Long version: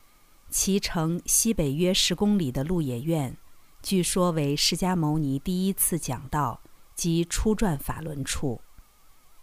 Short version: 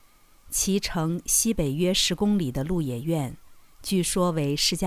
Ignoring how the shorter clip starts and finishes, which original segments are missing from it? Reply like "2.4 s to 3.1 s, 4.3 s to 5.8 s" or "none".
none